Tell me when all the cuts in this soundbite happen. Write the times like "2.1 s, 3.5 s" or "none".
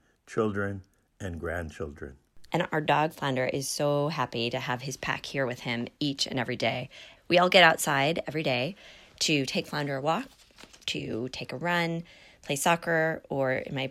2.5 s, 7.1 s

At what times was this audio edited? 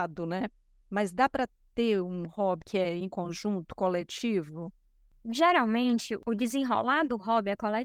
2.6 s

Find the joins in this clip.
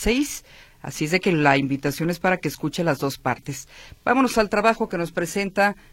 none

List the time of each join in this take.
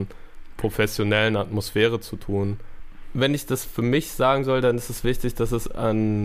none

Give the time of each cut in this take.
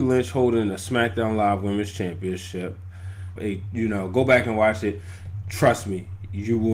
3.4 s

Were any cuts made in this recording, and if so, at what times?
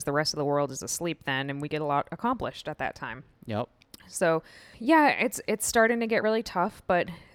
6.2 s

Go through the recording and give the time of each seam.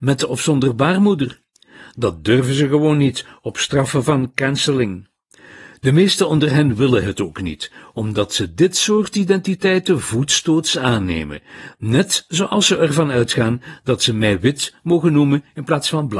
none

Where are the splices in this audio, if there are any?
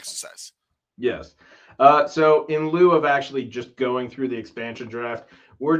none

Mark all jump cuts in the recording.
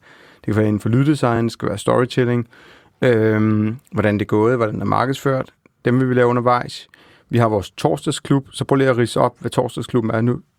none

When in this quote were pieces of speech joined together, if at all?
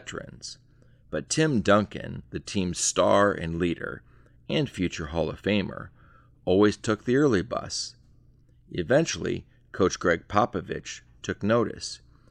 none

